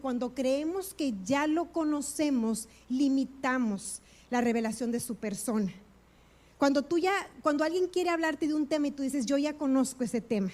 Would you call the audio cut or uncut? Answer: uncut